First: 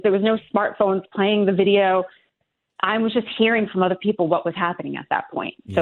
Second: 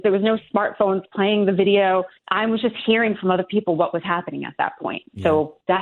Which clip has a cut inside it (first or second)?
second